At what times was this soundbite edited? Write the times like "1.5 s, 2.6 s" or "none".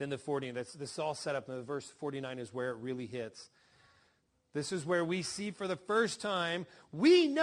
none